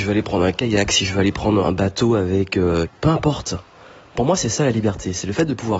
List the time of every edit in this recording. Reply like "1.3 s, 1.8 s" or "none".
1.6 s, 2.8 s